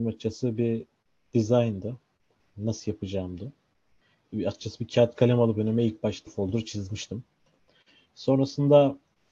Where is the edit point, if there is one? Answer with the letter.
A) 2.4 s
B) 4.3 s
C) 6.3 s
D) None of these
C